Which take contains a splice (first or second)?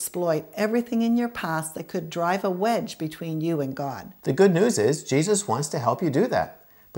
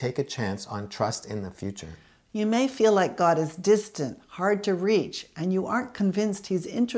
first